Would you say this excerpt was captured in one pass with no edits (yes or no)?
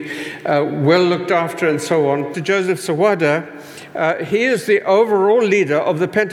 no